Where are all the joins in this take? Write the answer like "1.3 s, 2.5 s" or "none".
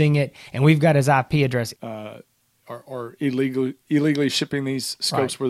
1.7 s